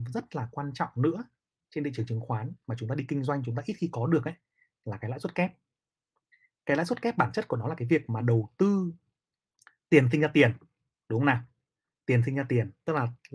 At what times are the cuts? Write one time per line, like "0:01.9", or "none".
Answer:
0:09.1